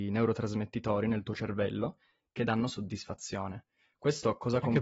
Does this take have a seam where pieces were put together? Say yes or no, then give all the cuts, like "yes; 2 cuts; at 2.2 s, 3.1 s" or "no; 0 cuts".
no; 0 cuts